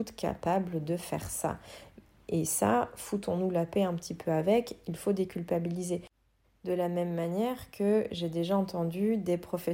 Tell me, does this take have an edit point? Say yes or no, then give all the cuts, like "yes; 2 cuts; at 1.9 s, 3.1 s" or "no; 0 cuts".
no; 0 cuts